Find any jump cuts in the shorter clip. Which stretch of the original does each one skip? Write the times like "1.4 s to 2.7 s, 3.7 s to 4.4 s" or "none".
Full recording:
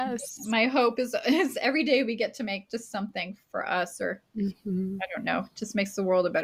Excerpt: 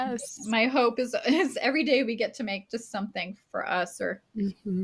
none

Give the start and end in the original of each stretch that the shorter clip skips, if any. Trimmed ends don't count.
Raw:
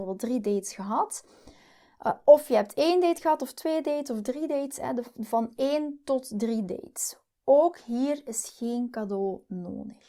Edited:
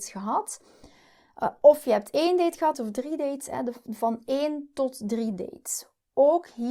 3.4 s to 4.0 s

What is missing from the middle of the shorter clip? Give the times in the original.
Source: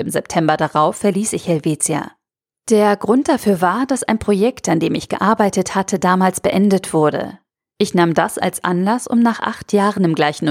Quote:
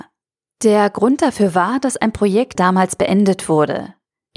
4.6 s to 6.0 s

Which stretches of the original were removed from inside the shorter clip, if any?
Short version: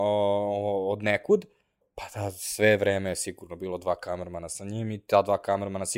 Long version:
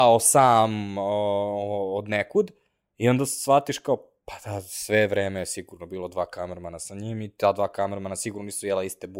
2.9 s to 4.1 s

